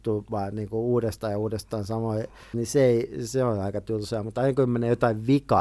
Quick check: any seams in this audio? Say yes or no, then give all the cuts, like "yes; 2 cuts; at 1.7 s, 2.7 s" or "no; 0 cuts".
yes; 1 cut; at 2.5 s